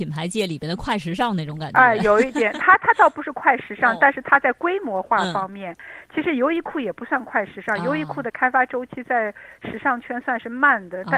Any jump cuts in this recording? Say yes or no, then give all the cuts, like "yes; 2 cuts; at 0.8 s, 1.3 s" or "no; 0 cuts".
no; 0 cuts